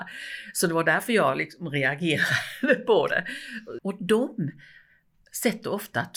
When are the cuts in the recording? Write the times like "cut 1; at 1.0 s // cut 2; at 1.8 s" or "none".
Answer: cut 1; at 3.8 s